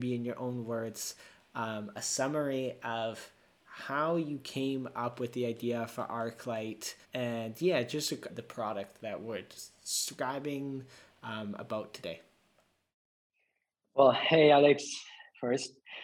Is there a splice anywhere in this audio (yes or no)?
yes